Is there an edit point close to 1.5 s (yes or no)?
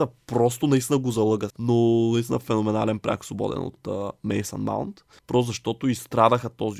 yes